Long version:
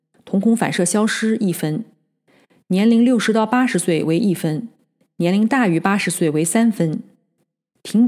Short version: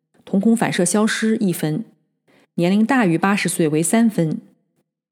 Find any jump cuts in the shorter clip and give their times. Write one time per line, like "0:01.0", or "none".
0:02.4